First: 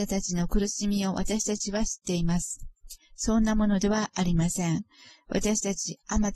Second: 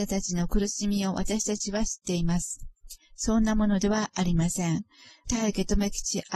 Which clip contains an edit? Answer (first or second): second